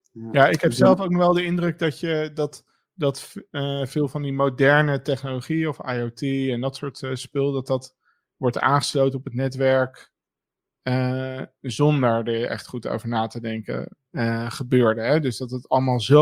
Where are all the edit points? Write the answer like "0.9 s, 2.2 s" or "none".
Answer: 14.0 s